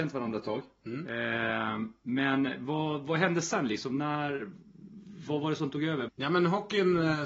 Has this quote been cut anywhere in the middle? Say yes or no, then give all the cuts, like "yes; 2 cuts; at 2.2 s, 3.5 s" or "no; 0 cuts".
yes; 1 cut; at 6.1 s